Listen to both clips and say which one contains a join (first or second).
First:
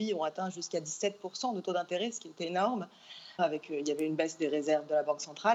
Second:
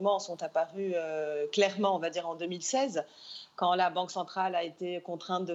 first